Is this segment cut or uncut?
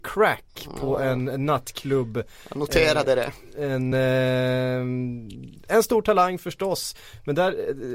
uncut